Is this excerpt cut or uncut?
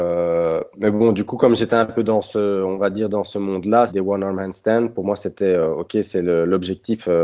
cut